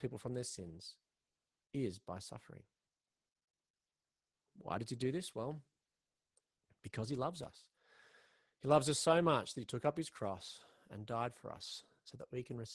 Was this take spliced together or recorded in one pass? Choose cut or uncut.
uncut